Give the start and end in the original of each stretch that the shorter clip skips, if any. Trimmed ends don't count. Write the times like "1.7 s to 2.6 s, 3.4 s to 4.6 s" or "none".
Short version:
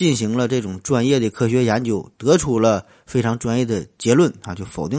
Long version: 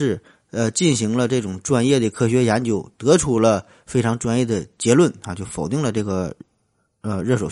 none